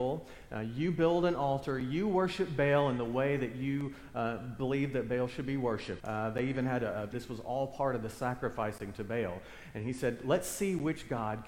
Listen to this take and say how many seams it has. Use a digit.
2